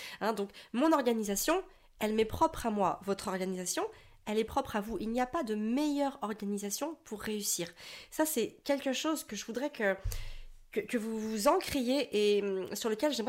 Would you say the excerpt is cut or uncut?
uncut